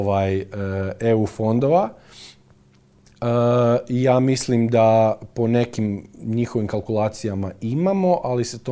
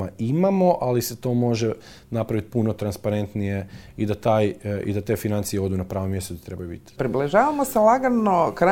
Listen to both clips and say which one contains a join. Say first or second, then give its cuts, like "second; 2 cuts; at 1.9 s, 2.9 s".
second; 1 cut; at 7.0 s